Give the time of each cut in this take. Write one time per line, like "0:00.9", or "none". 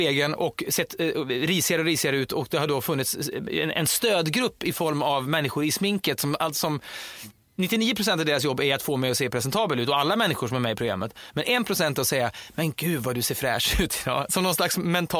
none